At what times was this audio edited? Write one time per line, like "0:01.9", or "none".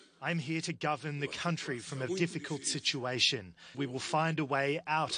0:02.1
0:03.7